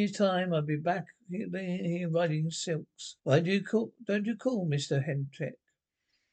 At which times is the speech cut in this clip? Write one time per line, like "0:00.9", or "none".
0:03.2